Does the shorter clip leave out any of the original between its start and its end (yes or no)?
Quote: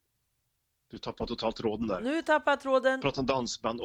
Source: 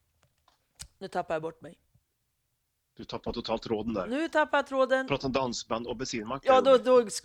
no